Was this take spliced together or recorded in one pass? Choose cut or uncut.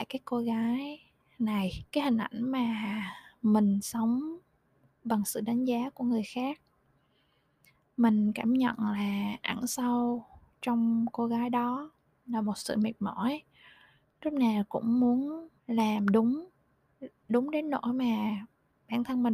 cut